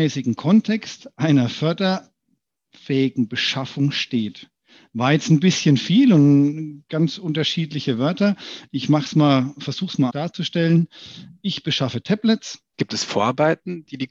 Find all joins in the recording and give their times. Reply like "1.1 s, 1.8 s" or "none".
10.1 s, 12.7 s